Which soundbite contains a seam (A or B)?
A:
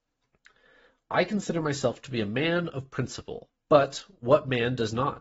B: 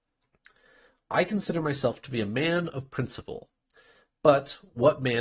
A